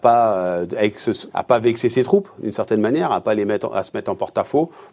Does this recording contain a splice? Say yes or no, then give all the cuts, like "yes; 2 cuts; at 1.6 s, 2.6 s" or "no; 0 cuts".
yes; 1 cut; at 1.3 s